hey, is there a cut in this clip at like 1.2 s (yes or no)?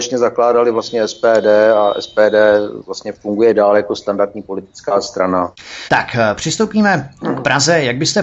no